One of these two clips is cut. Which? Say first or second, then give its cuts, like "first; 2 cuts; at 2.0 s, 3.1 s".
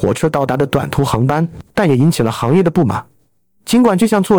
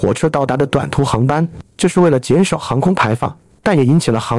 first; 1 cut; at 1.7 s